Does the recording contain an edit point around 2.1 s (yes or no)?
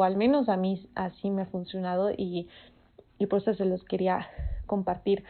no